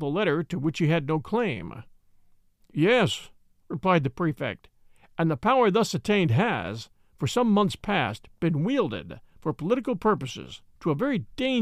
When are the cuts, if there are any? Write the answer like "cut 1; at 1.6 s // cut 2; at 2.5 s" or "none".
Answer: cut 1; at 2.6 s